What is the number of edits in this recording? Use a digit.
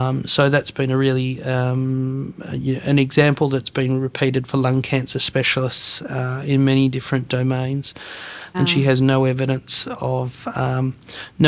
1